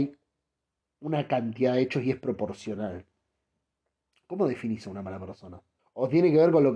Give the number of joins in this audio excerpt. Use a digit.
1